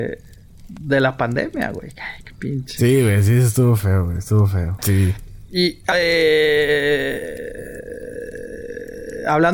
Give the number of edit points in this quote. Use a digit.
2